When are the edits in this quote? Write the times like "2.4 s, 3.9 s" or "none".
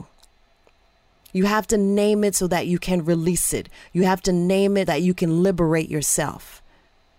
4.9 s

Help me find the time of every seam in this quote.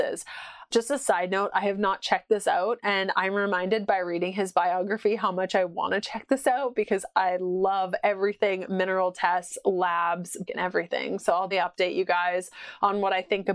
10.5 s, 11.5 s

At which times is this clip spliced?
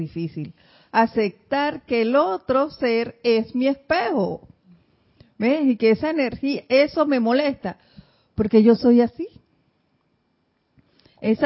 none

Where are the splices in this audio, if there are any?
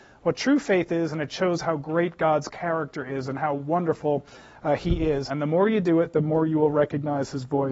5.3 s

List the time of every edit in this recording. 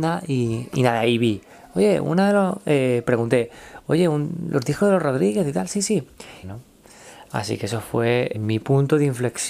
6.4 s, 8.3 s

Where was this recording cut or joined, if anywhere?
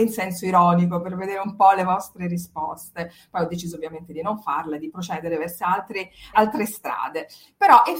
6.3 s

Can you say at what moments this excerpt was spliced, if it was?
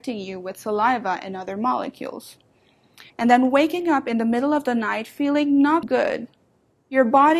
3.1 s, 5.8 s

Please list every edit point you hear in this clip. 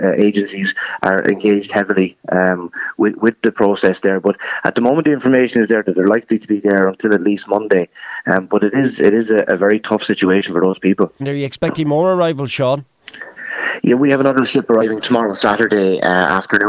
11.2 s

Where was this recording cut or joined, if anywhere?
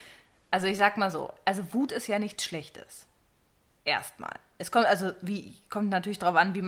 none

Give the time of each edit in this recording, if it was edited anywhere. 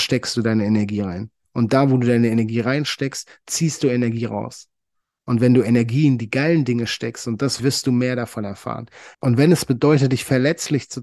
7.6 s, 9.1 s

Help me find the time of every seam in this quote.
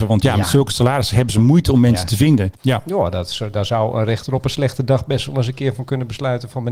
2.6 s

